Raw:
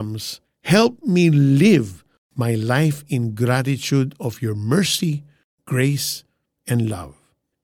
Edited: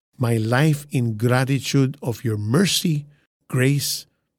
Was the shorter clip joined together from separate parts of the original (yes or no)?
no